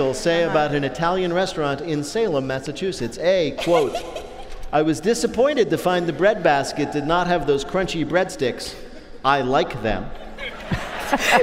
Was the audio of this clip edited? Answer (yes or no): no